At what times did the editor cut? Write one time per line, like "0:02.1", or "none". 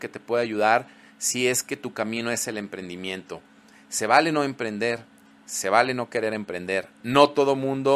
none